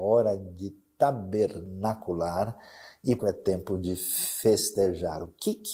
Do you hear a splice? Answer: yes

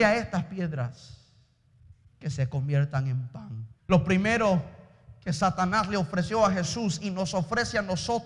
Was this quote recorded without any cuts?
no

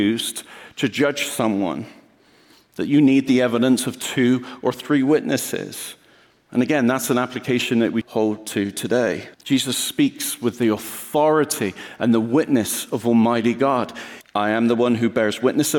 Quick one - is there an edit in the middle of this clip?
yes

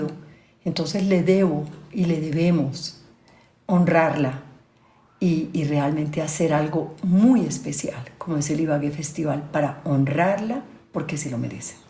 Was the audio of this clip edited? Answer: no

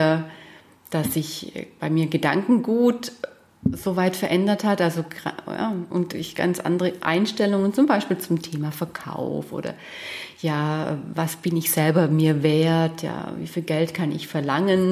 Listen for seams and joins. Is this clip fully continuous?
yes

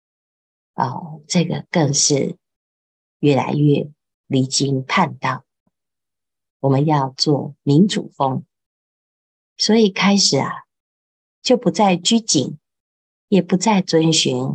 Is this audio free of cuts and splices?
no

